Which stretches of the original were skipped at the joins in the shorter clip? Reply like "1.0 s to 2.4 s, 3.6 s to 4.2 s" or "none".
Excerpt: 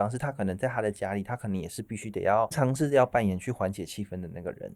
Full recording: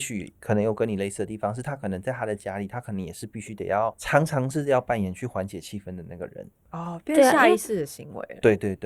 4.0 s to 4.3 s

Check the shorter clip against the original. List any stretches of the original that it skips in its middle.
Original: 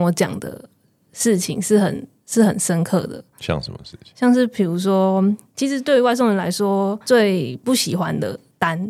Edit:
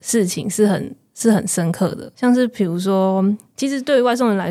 3.3 s to 4.1 s

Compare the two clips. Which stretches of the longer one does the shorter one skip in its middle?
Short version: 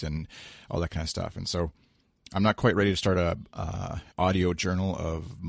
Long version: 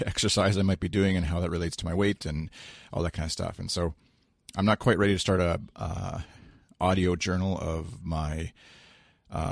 6.3 s to 6.7 s

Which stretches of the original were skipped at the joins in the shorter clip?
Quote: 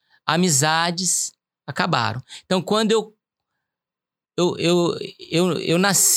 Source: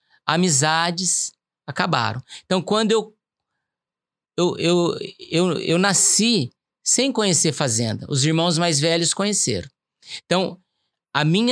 none

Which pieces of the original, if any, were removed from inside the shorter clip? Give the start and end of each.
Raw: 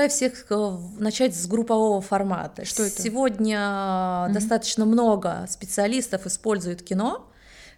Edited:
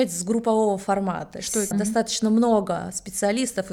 2.9 s to 4.3 s

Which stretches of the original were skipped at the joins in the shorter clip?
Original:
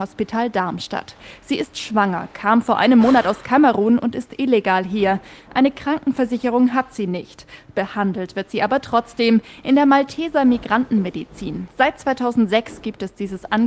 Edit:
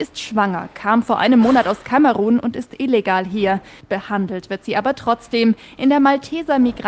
5.4 s to 7.7 s

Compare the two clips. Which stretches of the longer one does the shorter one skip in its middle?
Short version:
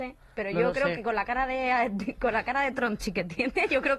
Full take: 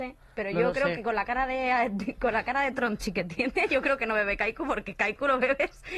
none

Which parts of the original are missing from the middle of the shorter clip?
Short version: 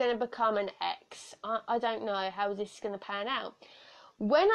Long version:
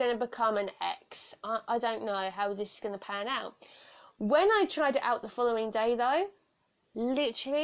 none

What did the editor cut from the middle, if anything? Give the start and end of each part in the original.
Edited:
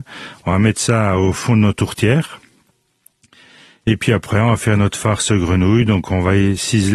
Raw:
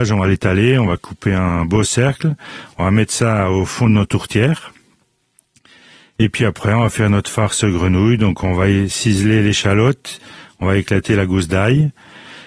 none

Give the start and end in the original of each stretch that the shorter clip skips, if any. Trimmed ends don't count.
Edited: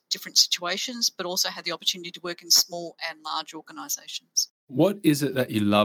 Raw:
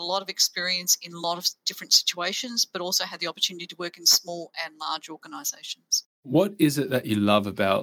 none

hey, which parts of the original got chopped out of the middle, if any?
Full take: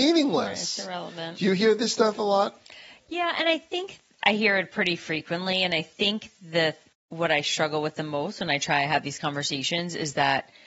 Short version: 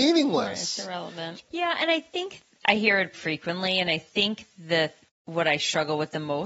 1.4 s to 2.9 s, 4.7 s to 5.0 s

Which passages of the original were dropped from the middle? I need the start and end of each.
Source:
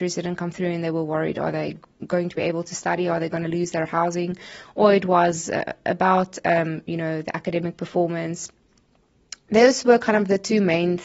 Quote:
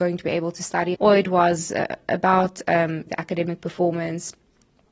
3.1 s to 4.7 s, 6.8 s to 7.2 s

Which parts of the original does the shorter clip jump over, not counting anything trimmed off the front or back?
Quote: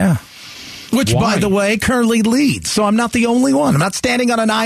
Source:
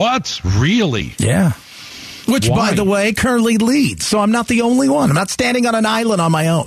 none

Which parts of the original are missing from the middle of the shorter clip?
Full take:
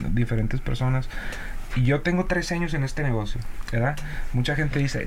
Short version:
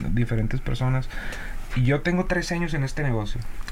none

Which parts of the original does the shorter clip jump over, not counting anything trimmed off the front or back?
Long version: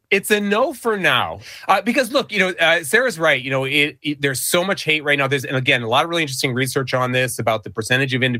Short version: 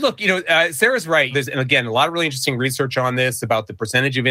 3.4 s to 5.3 s

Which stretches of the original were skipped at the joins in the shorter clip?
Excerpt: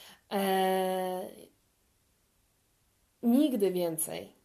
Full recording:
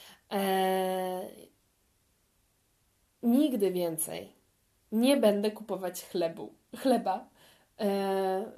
none

